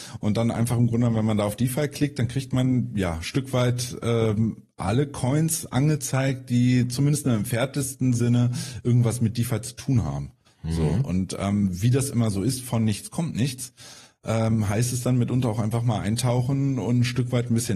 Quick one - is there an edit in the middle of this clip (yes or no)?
no